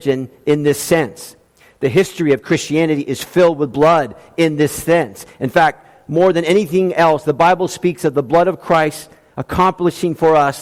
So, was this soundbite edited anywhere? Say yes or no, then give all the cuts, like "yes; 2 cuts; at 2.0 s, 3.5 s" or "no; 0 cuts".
no; 0 cuts